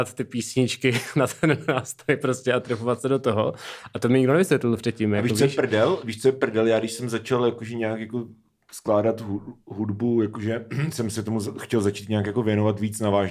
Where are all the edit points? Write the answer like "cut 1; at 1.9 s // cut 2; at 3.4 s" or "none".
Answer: none